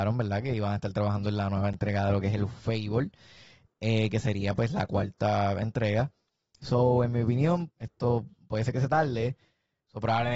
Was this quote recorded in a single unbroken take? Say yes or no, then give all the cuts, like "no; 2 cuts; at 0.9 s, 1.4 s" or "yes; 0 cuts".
no; 2 cuts; at 6.5 s, 7.7 s